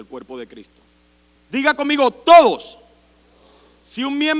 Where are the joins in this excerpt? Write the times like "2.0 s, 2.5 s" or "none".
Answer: 1.4 s